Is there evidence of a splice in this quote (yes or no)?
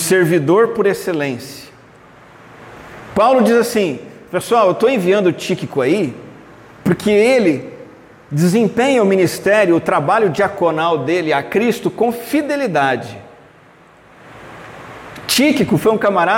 no